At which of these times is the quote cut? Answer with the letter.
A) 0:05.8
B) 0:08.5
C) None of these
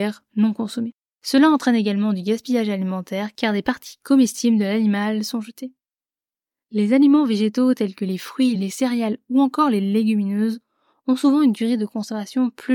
B